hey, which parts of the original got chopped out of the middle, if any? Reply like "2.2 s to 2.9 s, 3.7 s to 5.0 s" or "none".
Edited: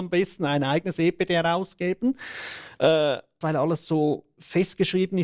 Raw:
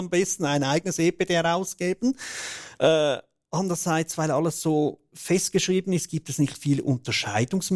3.4 s to 4.2 s